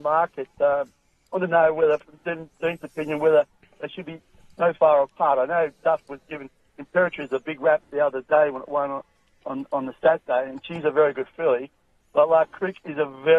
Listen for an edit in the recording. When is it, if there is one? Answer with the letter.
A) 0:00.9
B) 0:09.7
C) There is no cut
C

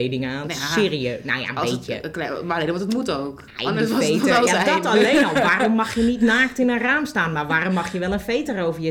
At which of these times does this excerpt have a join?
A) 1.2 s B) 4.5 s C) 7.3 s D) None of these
B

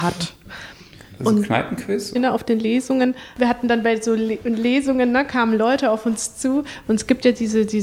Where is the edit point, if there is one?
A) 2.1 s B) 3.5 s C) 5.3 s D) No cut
A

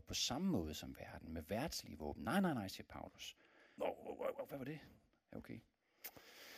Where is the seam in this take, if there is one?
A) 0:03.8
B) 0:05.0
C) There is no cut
A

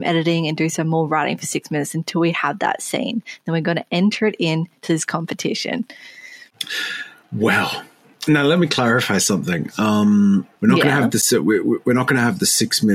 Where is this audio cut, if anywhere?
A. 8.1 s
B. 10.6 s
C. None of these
B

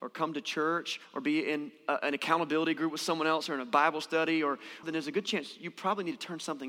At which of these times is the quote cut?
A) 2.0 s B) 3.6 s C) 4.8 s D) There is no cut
C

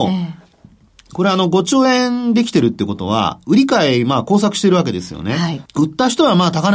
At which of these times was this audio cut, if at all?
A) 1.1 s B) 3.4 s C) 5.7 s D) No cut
C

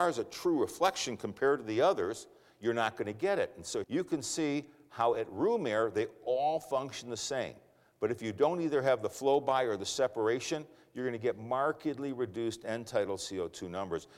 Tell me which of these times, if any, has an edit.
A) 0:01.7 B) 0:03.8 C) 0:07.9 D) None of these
B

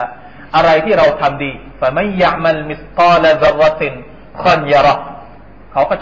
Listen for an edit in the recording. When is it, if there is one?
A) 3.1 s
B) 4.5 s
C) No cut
B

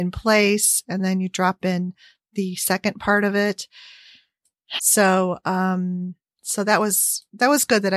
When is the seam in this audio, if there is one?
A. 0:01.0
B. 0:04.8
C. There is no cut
B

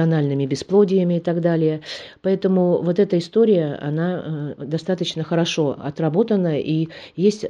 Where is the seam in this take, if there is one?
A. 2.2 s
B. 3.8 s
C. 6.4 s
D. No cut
D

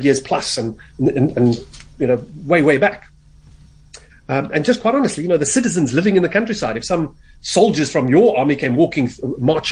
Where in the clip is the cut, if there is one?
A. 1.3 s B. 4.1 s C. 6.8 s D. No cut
B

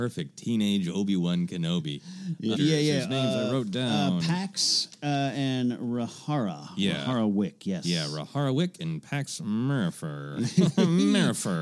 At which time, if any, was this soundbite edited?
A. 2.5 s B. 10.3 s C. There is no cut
A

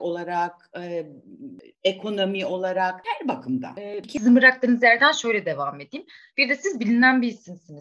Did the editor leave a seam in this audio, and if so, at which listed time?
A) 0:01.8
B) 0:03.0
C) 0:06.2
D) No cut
B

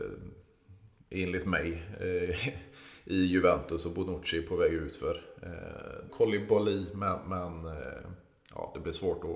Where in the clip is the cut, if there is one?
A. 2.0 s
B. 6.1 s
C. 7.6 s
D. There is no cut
B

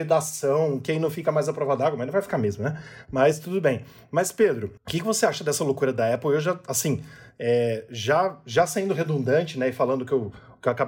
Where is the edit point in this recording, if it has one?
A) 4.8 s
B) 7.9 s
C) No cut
A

